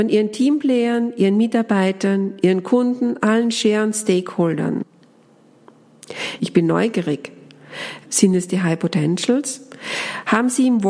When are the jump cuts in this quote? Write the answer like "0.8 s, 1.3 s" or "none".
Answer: 6.4 s, 8.0 s